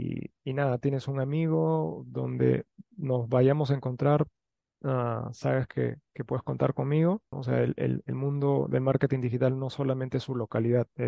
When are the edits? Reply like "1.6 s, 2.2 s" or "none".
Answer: 7.3 s